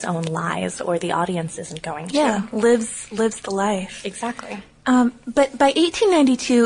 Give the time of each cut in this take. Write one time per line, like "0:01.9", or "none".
none